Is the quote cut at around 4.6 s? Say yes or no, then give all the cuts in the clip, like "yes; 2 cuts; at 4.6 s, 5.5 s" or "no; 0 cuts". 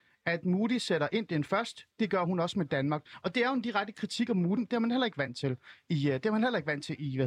yes; 1 cut; at 4.6 s